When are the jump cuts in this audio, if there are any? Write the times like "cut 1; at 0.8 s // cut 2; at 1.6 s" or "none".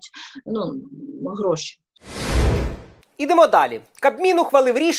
none